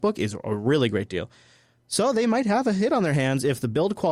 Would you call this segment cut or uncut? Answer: uncut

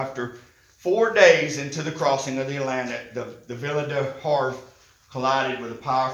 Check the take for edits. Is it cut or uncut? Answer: uncut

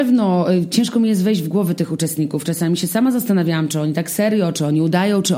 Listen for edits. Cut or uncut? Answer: uncut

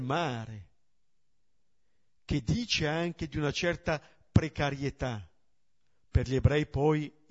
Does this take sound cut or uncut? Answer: uncut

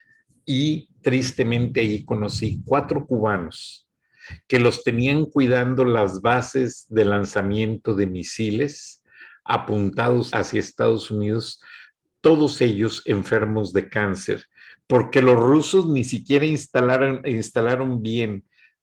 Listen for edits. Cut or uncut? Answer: cut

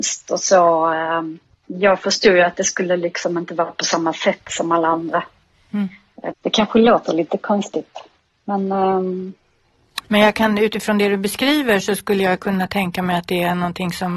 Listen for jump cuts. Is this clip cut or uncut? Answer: cut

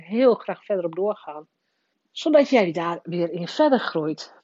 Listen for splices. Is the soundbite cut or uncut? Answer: cut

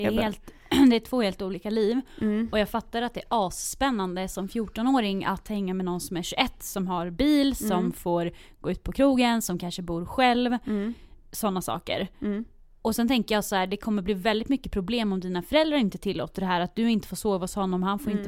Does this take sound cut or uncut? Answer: uncut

